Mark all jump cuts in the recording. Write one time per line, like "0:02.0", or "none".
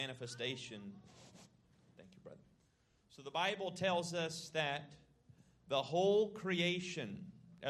none